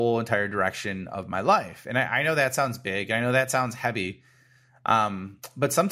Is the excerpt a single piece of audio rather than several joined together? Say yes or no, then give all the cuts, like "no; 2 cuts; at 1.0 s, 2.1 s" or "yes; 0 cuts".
yes; 0 cuts